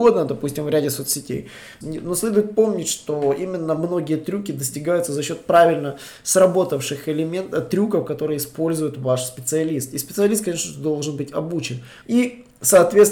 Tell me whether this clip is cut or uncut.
cut